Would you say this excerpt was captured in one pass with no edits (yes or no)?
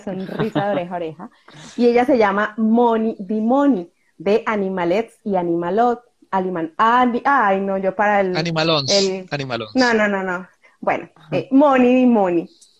yes